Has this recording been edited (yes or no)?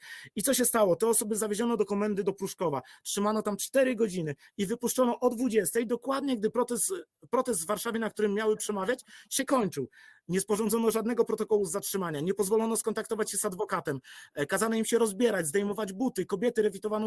no